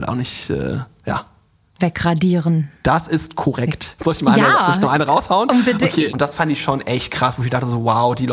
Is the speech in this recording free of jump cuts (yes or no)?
no